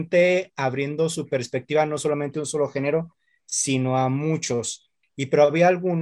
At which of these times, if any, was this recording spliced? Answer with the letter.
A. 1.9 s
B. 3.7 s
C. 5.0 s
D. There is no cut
C